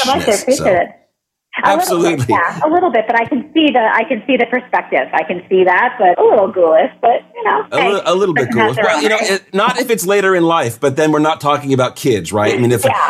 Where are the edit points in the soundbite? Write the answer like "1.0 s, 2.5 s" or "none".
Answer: 6.1 s

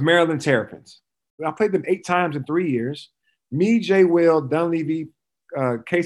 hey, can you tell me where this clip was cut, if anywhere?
1.4 s

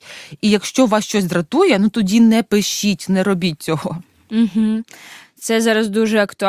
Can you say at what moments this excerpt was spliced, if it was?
5.2 s

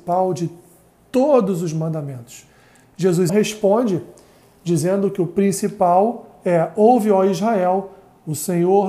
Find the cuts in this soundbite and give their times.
3.3 s

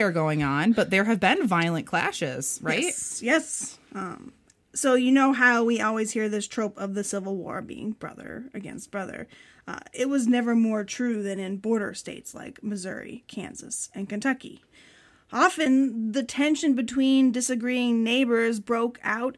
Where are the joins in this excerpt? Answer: none

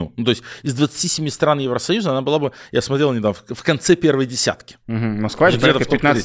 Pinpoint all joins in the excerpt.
4.8 s

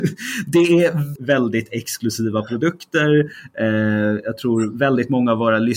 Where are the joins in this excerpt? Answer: 1.2 s

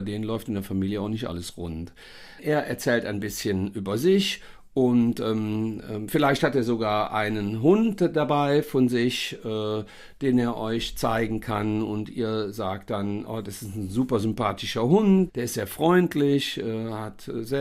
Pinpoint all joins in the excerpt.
2.4 s, 13.3 s, 15.3 s

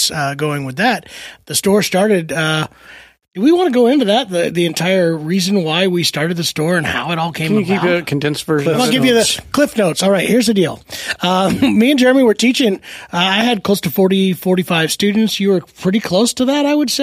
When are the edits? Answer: none

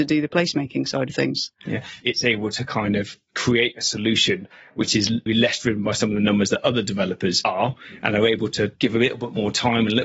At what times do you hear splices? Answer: 2.0 s, 5.3 s

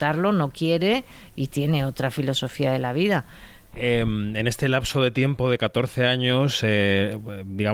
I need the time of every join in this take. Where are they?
3.7 s

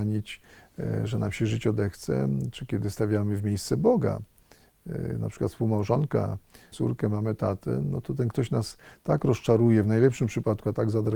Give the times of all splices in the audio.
6.7 s

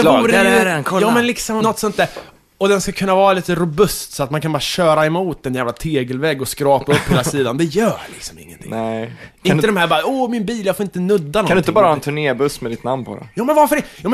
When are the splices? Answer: 1.6 s

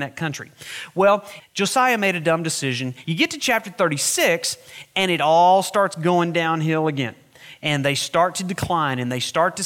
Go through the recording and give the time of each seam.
1.4 s, 3.0 s

